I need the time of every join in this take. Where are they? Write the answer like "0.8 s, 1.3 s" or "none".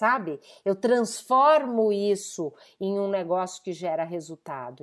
2.8 s

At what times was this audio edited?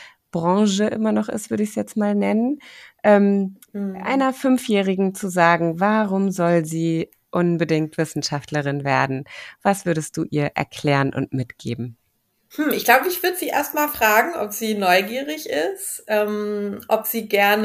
none

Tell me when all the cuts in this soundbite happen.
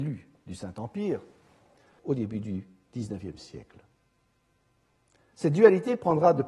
2.0 s, 5.3 s

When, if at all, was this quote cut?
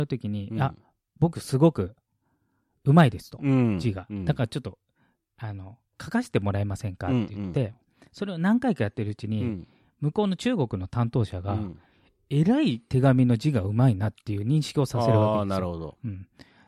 none

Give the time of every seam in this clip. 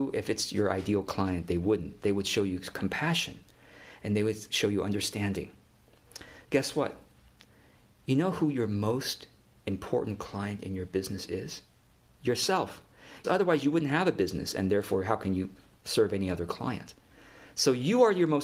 6.4 s, 12.1 s, 13.2 s

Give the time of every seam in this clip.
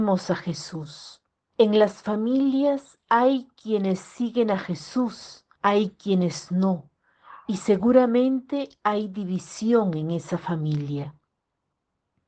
1.5 s, 5.5 s

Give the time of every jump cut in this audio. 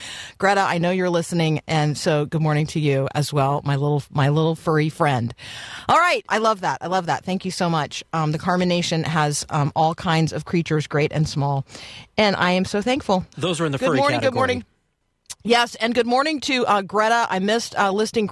6.3 s, 13.3 s

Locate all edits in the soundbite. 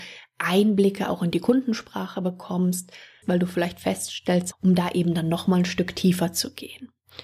3.2 s, 4.5 s

